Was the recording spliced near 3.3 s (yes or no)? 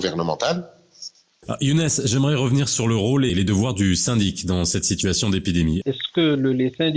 yes